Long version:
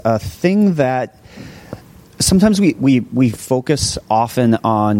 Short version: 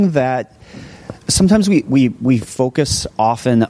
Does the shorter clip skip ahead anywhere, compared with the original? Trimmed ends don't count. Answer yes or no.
yes